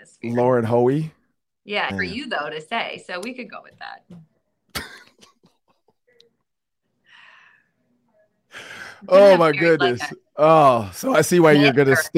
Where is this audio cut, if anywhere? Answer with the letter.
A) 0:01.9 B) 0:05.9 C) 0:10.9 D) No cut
A